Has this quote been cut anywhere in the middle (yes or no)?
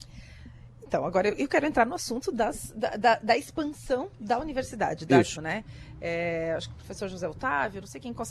yes